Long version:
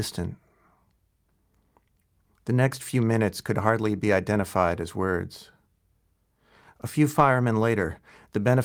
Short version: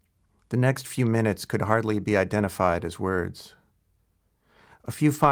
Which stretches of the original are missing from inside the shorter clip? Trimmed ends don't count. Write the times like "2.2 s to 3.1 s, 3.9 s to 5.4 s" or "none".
none